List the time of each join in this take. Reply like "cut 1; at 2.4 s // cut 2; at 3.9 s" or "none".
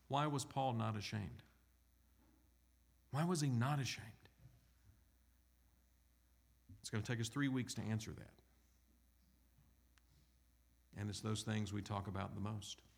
cut 1; at 10.9 s

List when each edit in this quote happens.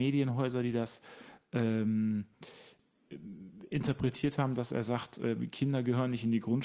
none

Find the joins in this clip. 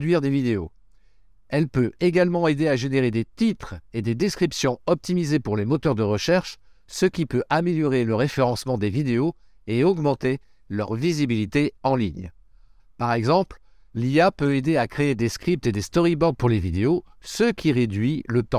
cut 1; at 12.8 s

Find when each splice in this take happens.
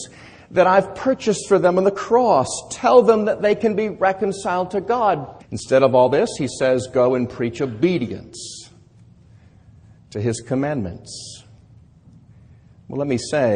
cut 1; at 5.4 s

